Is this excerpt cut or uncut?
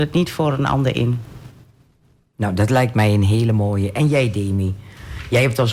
uncut